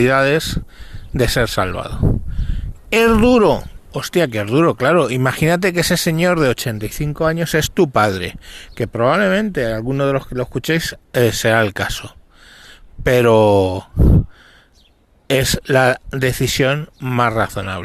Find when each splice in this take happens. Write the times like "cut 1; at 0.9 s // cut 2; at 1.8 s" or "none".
none

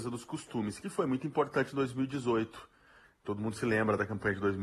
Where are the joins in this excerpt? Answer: cut 1; at 3.0 s

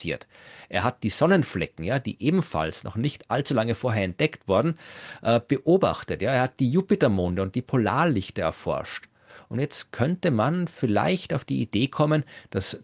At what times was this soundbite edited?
none

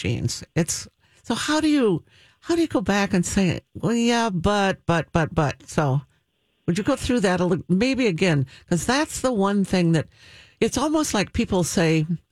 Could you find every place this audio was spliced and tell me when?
none

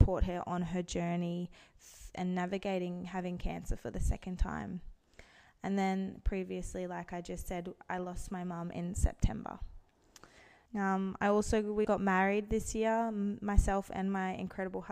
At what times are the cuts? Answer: cut 1; at 10.7 s // cut 2; at 11.8 s

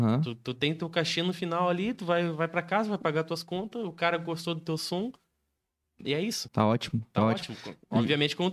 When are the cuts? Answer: cut 1; at 6.5 s

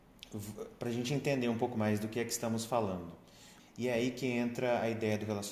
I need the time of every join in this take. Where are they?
cut 1; at 3.6 s

